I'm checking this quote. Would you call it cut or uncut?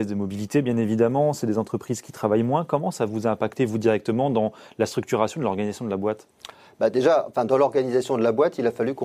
uncut